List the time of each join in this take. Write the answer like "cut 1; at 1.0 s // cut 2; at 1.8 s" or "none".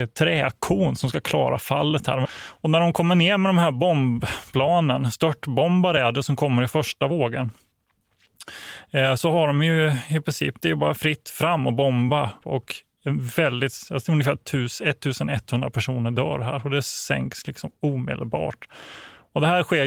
cut 1; at 2.3 s // cut 2; at 12.4 s